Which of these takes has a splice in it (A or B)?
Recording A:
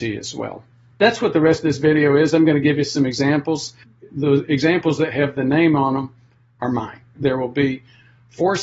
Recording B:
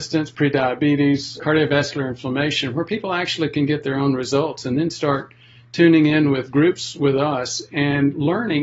A